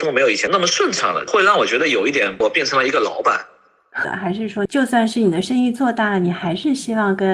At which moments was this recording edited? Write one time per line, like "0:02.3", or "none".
0:04.0